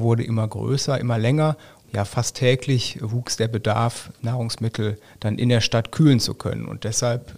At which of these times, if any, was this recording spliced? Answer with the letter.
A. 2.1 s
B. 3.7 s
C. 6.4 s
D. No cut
D